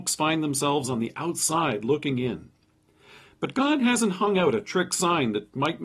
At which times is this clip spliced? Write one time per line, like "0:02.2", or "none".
none